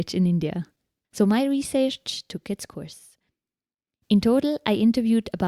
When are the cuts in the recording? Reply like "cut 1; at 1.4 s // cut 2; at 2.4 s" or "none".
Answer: cut 1; at 1.0 s